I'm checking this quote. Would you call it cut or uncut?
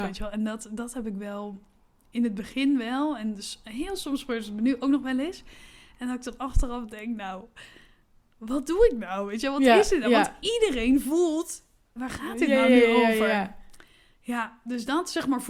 cut